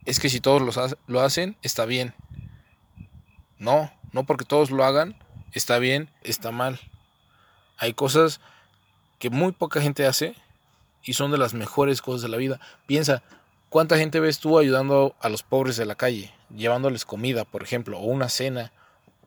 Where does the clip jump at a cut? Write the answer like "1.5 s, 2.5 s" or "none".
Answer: 6.2 s